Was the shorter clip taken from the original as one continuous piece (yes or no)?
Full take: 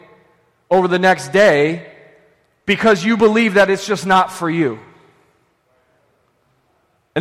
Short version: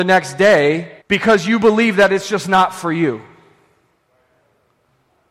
no